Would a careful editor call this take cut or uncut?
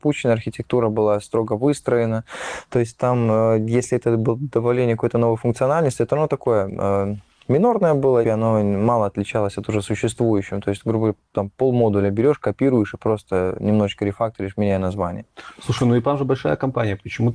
cut